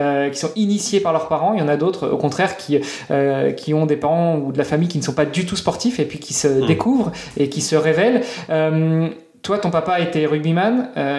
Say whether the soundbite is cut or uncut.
uncut